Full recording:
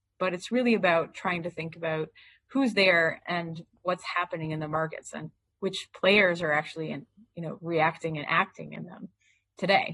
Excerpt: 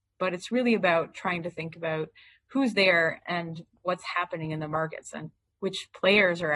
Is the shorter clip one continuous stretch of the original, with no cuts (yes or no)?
yes